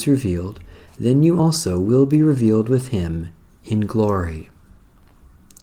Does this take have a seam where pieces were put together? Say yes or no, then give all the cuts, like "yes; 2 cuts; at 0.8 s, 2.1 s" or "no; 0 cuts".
no; 0 cuts